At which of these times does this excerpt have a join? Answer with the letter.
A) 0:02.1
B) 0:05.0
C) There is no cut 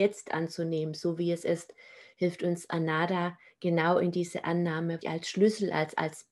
B